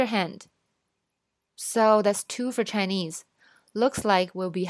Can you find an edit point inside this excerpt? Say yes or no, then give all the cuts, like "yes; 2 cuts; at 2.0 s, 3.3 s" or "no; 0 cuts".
no; 0 cuts